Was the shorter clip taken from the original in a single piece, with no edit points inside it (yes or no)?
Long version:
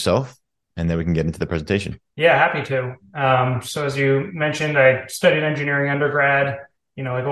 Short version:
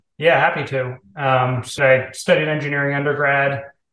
no